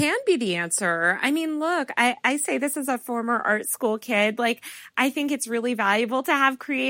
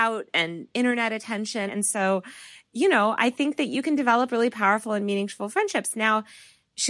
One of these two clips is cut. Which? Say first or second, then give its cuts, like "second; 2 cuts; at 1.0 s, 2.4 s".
second; 1 cut; at 1.7 s